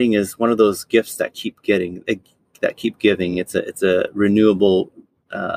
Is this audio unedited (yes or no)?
yes